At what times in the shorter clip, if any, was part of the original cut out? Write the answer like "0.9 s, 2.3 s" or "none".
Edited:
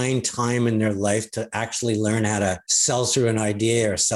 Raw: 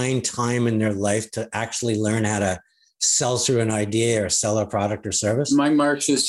2.6 s